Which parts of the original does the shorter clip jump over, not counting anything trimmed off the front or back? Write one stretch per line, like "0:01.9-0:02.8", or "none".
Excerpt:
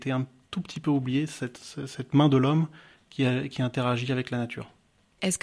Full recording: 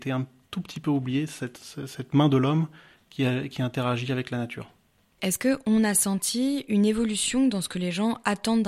none